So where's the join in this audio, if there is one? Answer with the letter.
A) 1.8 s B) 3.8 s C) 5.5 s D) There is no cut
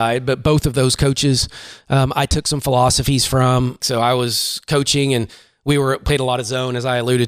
B